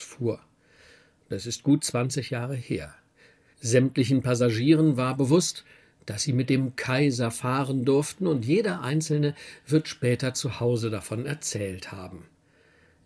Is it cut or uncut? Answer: uncut